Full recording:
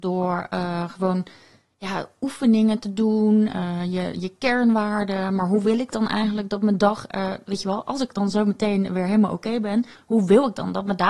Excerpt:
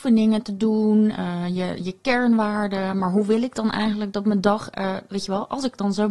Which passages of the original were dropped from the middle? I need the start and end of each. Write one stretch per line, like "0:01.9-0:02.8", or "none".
none